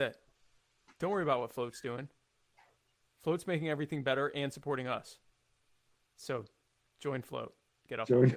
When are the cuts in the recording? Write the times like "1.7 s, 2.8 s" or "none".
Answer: none